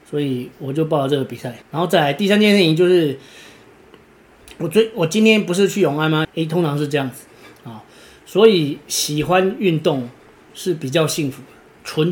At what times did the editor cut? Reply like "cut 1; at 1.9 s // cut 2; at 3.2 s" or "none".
cut 1; at 1.6 s // cut 2; at 6.2 s

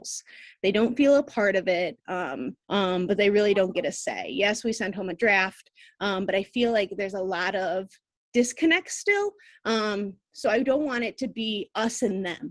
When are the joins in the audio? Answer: cut 1; at 2.6 s

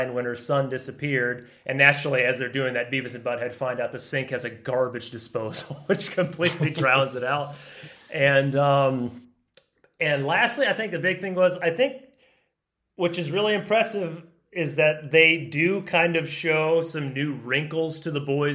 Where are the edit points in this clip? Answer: none

